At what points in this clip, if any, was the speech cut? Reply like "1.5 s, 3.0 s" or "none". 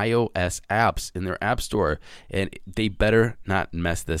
2.2 s